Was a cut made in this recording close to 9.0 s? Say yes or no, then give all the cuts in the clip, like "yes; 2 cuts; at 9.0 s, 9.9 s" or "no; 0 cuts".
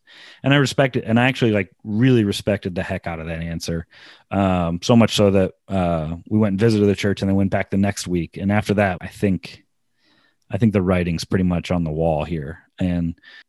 yes; 1 cut; at 9.0 s